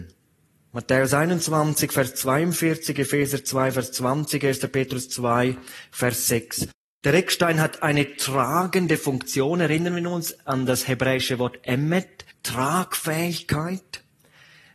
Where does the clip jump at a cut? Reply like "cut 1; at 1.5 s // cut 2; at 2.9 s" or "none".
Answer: cut 1; at 12.3 s